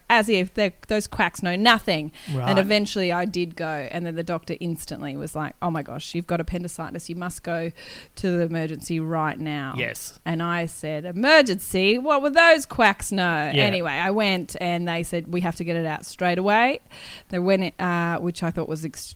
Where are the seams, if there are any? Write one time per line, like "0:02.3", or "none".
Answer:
none